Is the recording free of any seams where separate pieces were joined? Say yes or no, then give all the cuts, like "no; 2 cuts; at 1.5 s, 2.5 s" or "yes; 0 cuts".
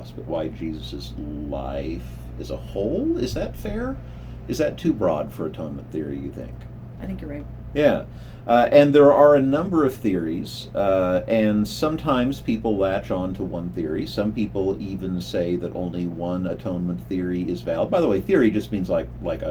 no; 1 cut; at 7.0 s